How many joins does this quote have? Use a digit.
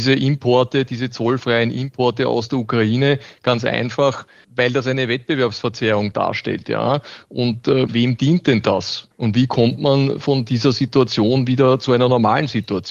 2